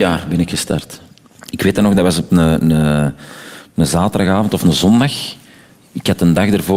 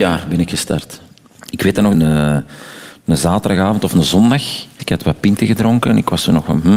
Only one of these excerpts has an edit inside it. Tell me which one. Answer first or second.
second